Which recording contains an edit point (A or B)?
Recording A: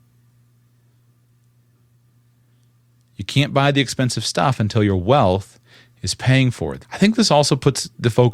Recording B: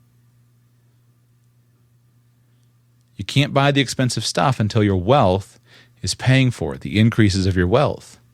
A